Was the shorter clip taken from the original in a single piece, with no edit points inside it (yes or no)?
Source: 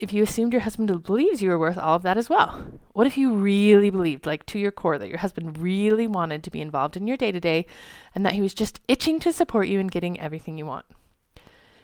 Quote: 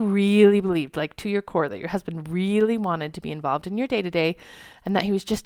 yes